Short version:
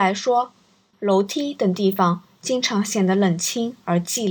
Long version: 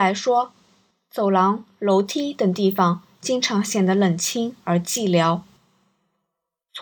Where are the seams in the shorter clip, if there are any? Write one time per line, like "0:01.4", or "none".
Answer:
0:00.9